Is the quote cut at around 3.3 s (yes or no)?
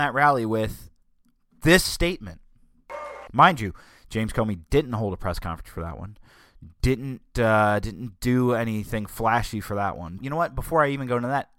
yes